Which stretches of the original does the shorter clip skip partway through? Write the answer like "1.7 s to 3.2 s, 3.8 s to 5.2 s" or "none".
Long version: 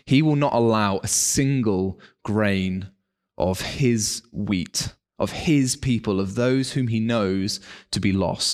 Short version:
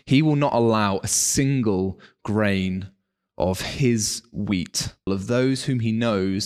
5.1 s to 6.2 s